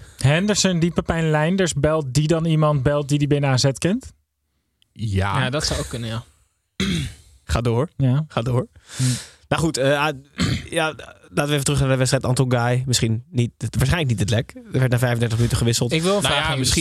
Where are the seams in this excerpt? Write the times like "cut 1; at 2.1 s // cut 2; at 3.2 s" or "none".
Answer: none